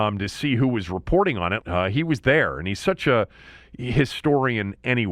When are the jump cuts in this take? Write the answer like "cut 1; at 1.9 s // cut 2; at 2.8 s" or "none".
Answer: cut 1; at 1.6 s